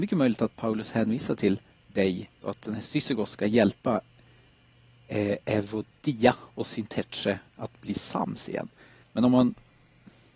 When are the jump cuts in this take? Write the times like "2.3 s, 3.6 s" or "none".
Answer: 2.4 s, 9.0 s